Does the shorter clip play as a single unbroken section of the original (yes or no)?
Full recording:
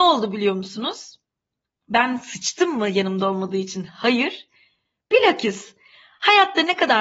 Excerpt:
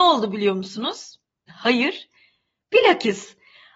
no